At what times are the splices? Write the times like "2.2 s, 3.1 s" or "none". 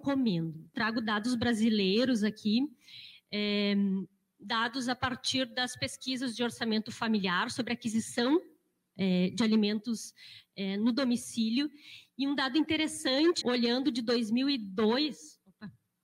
13.4 s